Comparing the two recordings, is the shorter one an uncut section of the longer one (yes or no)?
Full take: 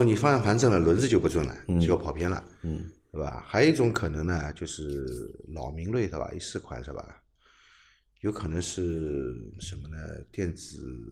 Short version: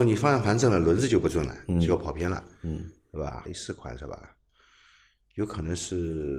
no